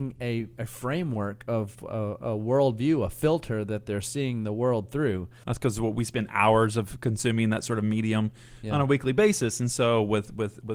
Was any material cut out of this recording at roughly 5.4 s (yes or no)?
yes